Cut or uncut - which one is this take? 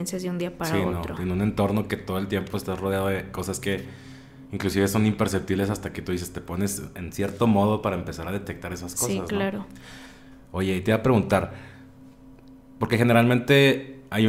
uncut